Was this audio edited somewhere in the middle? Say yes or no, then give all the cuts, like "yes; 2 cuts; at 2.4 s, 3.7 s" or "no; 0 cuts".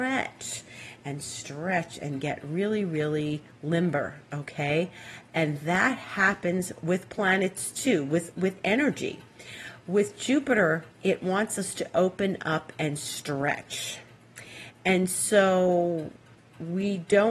no; 0 cuts